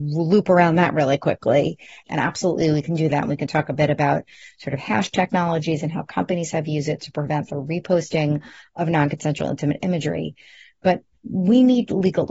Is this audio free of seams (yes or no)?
no